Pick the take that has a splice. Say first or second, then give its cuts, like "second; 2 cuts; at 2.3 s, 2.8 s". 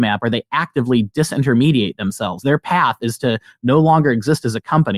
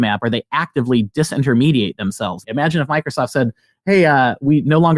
second; 1 cut; at 2.4 s